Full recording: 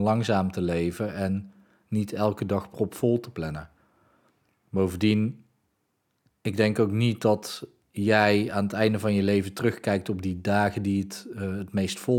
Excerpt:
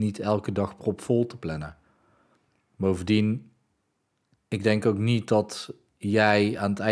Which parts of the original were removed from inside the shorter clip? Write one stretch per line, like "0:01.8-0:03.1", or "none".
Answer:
none